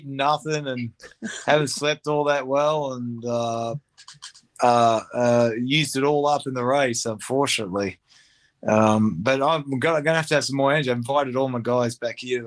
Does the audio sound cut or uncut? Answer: uncut